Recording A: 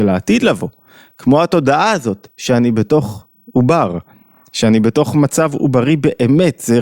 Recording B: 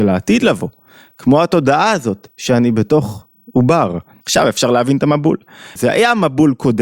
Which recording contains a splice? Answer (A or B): B